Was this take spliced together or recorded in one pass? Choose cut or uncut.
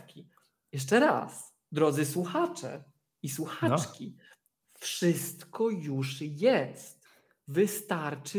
cut